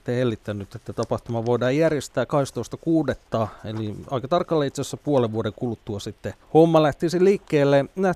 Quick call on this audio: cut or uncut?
cut